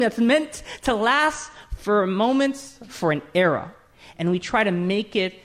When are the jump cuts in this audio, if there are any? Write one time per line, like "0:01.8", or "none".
0:02.9